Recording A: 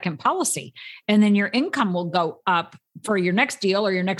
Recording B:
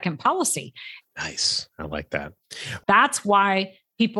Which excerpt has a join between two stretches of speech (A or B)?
B